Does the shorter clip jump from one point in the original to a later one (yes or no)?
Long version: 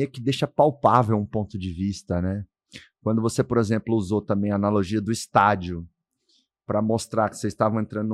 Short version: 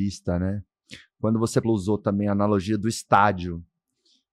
yes